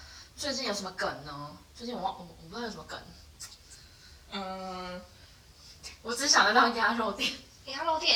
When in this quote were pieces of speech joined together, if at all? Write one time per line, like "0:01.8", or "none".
none